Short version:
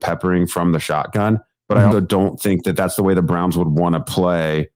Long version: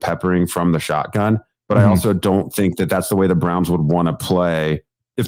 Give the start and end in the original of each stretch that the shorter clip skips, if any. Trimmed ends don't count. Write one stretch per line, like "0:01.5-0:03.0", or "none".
0:01.9-0:02.0